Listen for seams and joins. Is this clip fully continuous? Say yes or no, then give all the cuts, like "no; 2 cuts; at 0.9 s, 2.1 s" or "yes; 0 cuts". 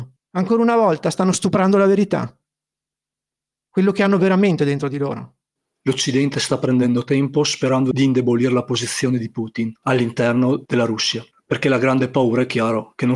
no; 1 cut; at 5.8 s